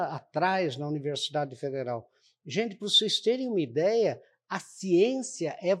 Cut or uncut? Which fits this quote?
uncut